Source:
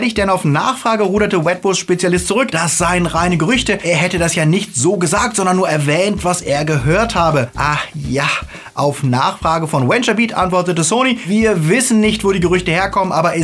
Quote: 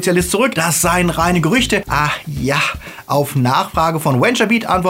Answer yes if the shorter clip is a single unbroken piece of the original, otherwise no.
no